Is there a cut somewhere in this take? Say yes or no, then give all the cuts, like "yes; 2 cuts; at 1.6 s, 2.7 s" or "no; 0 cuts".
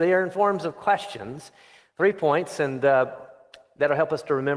no; 0 cuts